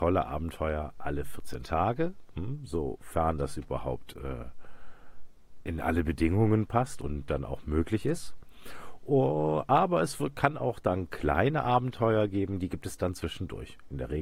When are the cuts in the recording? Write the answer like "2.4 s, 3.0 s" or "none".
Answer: 5.6 s